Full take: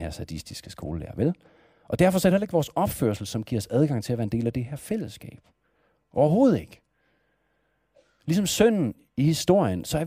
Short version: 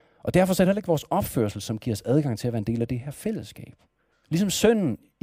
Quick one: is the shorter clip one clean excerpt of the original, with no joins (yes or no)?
no